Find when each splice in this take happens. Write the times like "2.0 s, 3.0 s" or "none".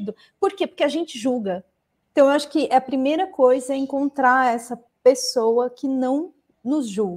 2.0 s